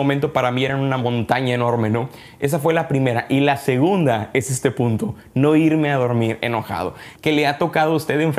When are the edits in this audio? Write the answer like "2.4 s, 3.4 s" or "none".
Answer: 7.2 s